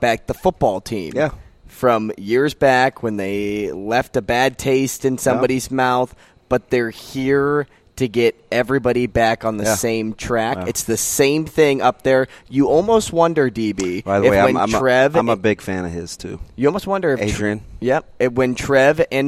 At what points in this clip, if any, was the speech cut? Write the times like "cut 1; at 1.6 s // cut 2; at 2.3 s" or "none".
none